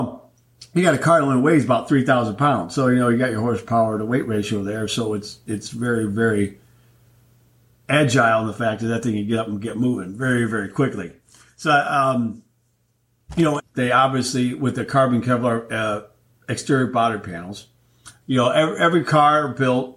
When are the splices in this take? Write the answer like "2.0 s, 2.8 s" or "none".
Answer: 13.6 s, 18.2 s